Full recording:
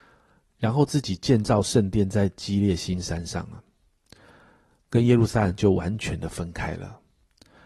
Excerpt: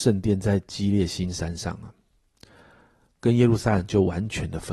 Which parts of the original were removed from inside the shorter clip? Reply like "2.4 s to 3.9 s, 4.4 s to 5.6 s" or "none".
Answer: none